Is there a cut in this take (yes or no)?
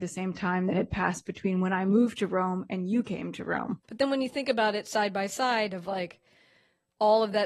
yes